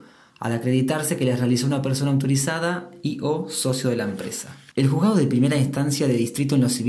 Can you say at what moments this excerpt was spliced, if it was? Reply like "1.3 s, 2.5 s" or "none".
4.7 s